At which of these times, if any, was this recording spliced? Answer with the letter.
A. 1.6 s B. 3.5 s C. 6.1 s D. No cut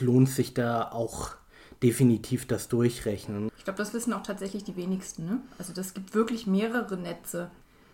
B